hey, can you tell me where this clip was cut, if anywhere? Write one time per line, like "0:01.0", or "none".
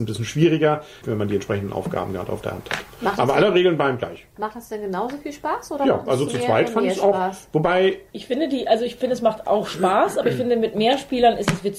0:01.0

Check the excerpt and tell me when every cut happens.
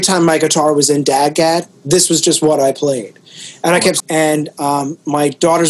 0:04.0

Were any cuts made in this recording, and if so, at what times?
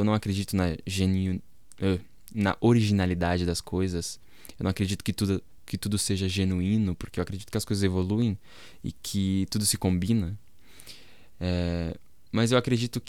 none

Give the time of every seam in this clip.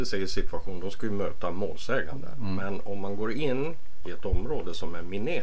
none

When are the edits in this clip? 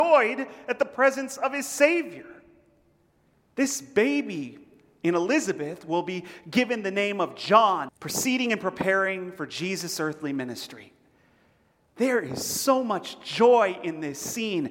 0:07.9
0:11.8

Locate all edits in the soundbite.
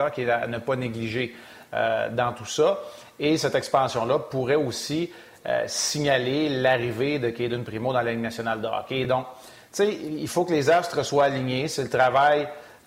none

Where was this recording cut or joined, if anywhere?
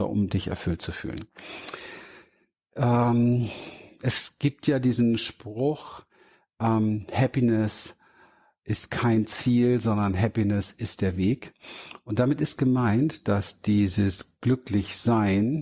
none

